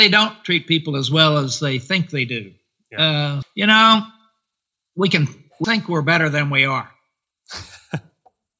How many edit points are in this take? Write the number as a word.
two